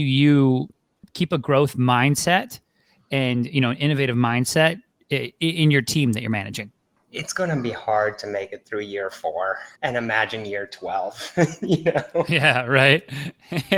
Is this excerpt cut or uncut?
cut